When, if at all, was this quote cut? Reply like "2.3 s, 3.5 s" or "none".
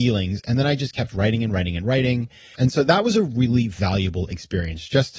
2.5 s